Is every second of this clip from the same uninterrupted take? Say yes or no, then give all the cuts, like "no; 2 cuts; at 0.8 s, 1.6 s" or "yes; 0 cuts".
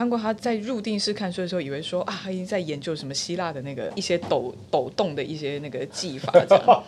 yes; 0 cuts